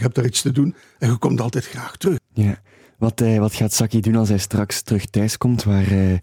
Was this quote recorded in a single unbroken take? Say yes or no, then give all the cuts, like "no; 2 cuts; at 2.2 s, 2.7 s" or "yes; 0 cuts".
no; 1 cut; at 2.2 s